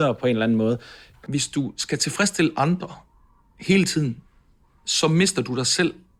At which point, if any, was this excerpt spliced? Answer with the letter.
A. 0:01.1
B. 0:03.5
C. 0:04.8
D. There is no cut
A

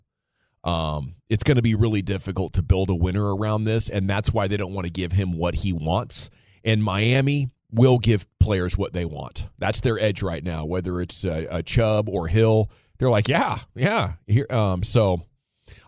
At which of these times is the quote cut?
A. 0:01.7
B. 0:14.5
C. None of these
A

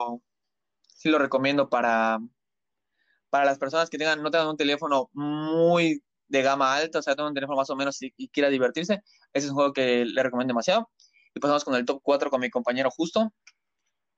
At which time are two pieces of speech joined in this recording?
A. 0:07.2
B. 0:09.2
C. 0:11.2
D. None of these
D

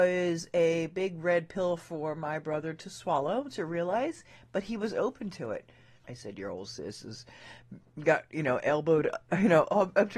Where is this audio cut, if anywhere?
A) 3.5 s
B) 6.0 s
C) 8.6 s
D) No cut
B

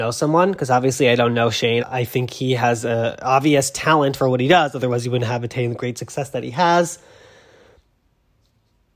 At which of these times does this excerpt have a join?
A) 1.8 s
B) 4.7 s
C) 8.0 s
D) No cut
A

